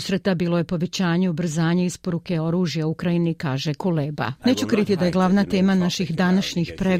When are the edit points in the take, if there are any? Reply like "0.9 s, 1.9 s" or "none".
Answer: 4.4 s